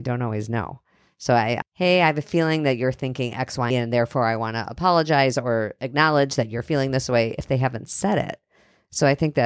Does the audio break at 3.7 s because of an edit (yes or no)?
yes